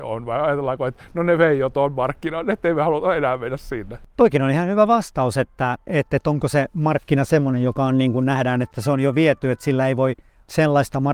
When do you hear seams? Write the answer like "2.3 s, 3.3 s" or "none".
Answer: none